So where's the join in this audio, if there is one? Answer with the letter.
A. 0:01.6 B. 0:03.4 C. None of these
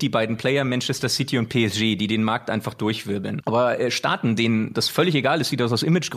B